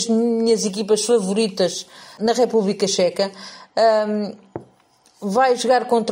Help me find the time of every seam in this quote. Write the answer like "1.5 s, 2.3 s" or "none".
2.2 s